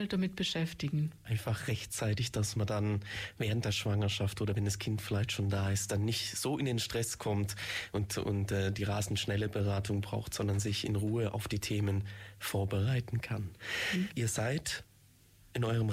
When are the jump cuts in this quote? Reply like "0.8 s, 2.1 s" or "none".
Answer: 14.1 s